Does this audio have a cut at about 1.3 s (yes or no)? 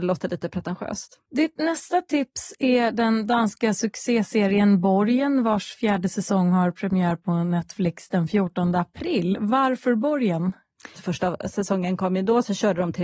no